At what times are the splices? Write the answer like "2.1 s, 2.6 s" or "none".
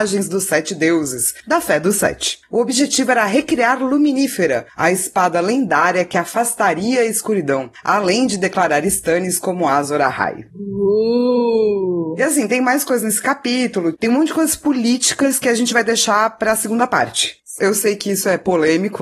13.9 s, 17.6 s

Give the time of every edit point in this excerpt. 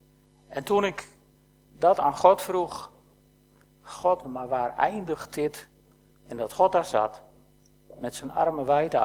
4.2 s, 6.1 s

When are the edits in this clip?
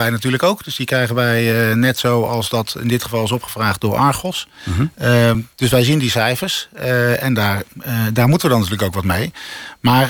none

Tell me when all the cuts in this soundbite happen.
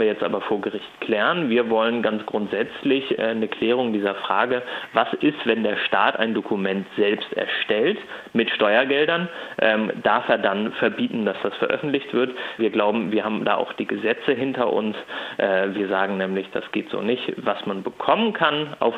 12.6 s

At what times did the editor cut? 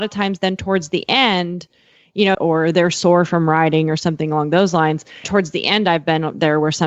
2.3 s, 5.2 s

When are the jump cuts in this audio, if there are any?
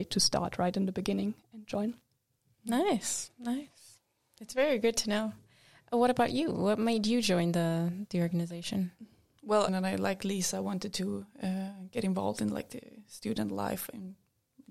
9.7 s

